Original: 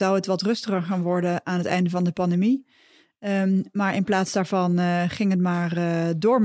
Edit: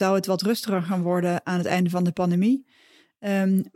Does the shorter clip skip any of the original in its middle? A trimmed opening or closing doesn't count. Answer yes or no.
no